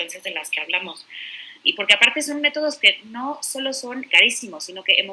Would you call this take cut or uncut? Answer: cut